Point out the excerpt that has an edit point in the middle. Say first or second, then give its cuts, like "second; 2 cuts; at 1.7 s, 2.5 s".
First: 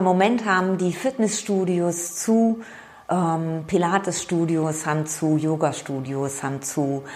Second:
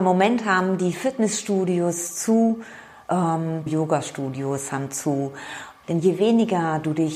second; 2 cuts; at 3.7 s, 5.8 s